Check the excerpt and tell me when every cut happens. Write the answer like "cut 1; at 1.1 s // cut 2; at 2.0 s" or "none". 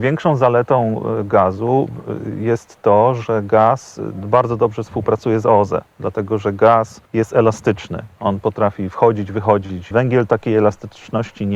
cut 1; at 7.1 s // cut 2; at 9.9 s